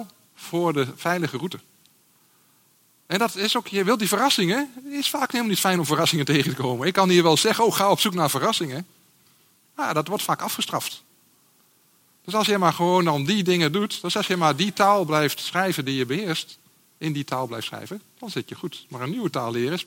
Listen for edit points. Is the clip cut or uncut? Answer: uncut